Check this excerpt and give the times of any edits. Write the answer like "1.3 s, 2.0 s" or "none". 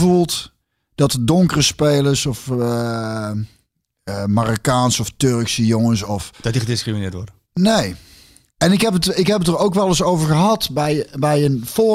none